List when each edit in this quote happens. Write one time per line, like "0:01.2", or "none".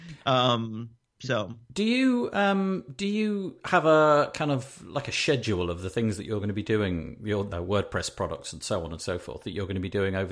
0:07.5